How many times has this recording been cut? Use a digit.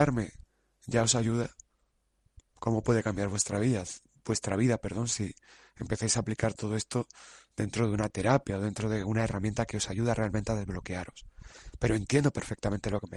0